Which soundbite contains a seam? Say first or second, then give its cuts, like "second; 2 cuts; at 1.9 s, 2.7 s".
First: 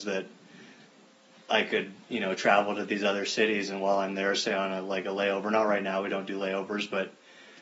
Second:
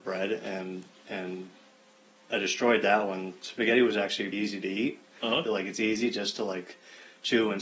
second; 2 cuts; at 4.3 s, 5.5 s